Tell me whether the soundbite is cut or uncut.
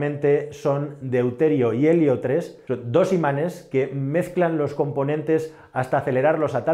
uncut